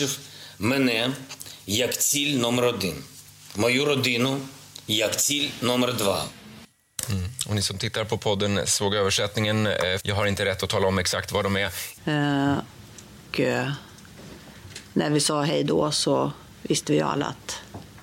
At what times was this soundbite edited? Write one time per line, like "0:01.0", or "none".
0:10.0
0:12.0
0:13.2